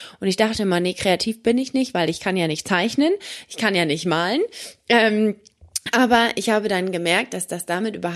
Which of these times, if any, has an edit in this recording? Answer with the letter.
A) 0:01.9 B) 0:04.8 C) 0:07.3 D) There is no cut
D